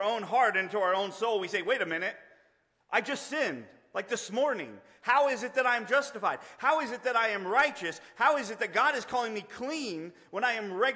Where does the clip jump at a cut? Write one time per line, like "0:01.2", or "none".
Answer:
none